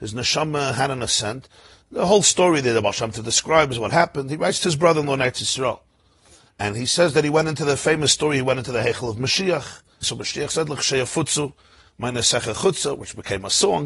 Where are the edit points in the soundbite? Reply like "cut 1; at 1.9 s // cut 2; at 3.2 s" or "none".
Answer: cut 1; at 10.0 s